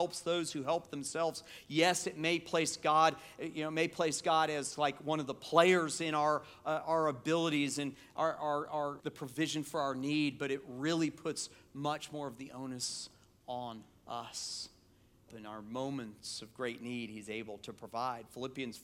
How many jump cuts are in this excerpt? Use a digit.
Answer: 2